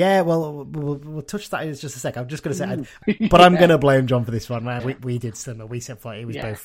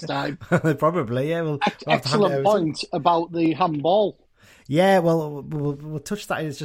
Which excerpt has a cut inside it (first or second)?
first